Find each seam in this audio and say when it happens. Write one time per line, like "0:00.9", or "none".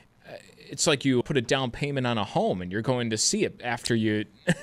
0:01.2